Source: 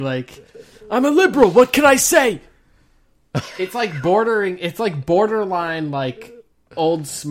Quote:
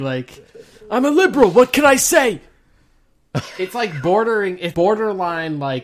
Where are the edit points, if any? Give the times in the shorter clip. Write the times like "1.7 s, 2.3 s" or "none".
4.7 s